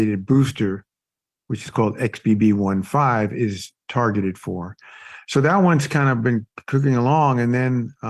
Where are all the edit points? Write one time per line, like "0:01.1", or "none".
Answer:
none